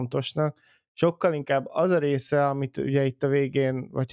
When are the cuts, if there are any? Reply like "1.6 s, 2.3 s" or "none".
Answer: none